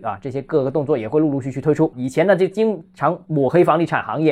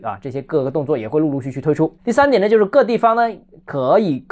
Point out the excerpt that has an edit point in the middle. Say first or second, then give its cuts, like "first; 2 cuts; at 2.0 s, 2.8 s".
first; 1 cut; at 1.9 s